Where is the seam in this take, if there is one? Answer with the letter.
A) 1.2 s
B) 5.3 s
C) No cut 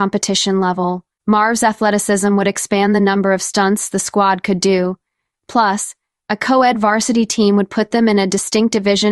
A